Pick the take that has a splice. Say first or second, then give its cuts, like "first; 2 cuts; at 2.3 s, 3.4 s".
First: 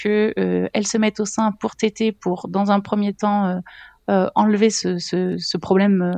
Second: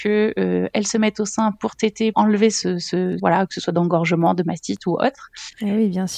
second; 2 cuts; at 2.1 s, 3.2 s